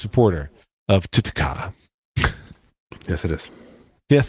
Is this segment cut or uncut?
cut